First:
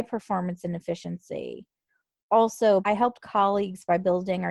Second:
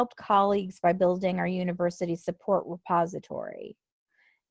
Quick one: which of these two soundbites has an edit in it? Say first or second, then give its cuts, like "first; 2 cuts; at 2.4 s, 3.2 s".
first; 1 cut; at 2.8 s